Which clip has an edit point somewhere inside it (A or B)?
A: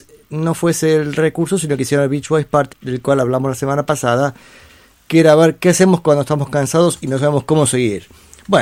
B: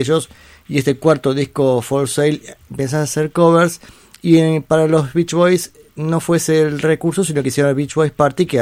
A